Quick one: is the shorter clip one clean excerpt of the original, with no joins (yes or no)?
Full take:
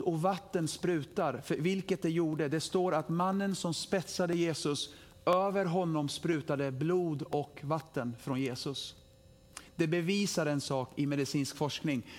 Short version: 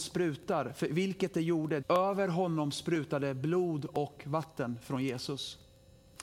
no